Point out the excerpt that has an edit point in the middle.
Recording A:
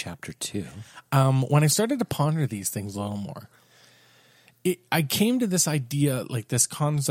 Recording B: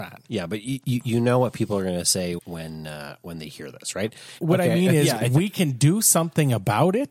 B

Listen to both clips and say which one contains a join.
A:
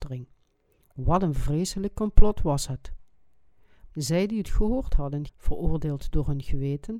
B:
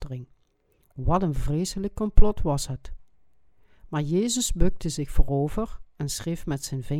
A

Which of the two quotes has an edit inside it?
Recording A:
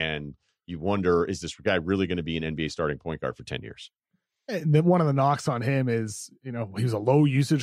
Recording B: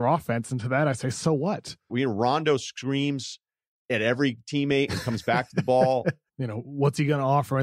B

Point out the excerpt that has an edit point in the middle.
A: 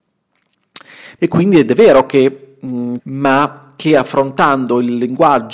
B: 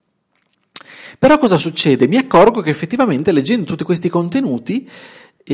A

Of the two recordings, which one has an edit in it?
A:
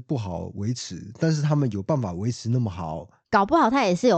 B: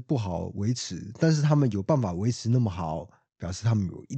A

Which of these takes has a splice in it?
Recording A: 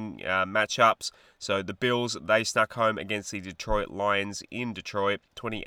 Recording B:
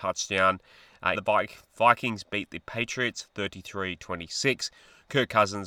B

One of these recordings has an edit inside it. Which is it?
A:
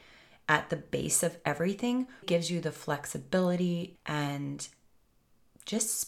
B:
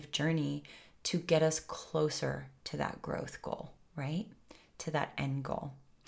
A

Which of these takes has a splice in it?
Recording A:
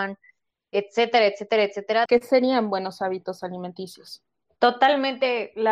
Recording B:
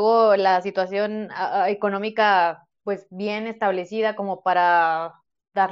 A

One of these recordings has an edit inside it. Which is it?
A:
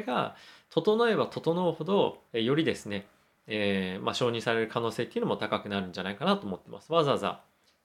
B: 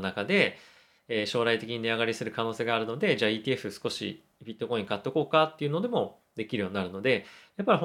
A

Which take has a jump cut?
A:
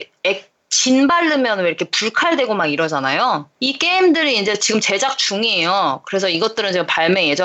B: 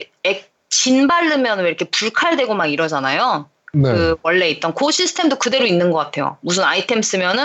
A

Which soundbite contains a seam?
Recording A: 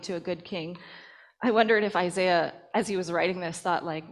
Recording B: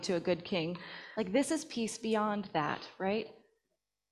B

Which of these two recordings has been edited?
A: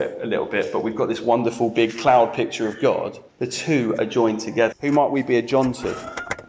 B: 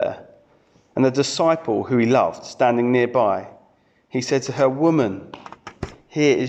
A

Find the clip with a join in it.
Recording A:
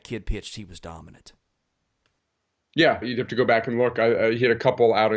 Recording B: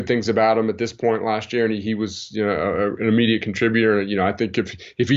A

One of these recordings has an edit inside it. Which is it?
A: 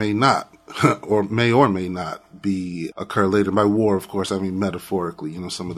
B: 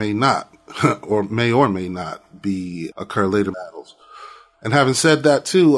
B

